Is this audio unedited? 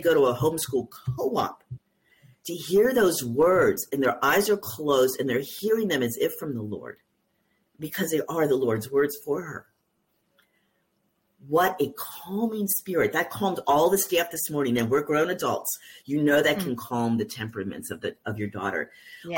yes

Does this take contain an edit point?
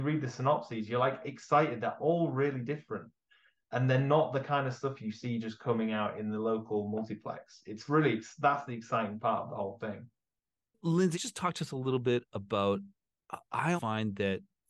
yes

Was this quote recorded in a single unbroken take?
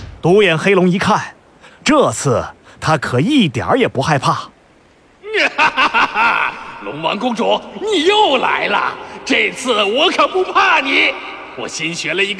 no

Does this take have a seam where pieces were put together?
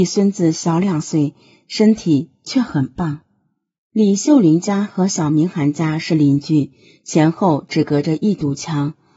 no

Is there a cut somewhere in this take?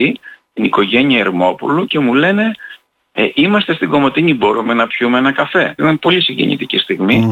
yes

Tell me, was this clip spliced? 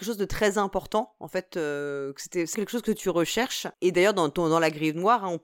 yes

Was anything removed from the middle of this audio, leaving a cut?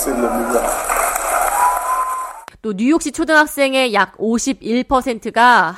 yes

